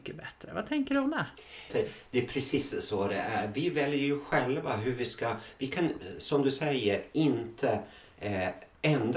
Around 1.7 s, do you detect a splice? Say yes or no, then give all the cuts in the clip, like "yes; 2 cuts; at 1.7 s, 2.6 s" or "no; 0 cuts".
yes; 1 cut; at 1.7 s